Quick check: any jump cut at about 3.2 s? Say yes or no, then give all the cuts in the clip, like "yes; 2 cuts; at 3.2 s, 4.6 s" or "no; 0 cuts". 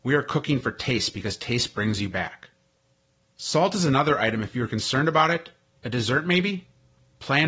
no; 1 cut; at 5.7 s